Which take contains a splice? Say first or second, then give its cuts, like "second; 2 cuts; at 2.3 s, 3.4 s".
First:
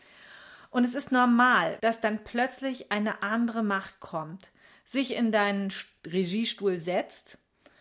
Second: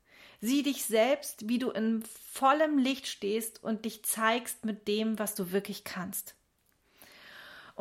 first; 1 cut; at 1.8 s